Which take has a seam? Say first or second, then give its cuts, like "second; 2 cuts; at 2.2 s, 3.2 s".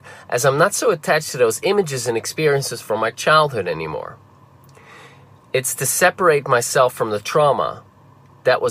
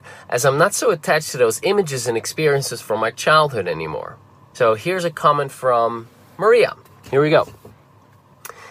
second; 1 cut; at 4.5 s